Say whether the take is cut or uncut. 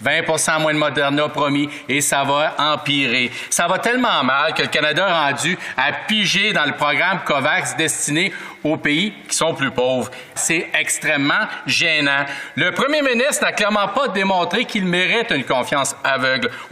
cut